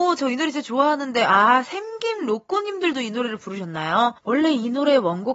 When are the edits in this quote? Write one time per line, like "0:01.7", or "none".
0:04.2